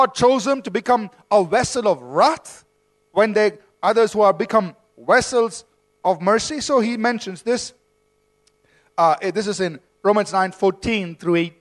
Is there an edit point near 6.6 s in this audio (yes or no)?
no